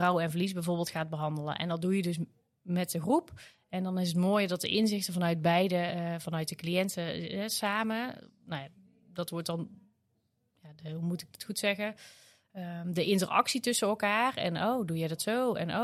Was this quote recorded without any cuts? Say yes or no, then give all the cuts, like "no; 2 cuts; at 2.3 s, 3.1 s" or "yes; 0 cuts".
yes; 0 cuts